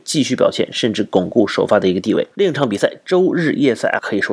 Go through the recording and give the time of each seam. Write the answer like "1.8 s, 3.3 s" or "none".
none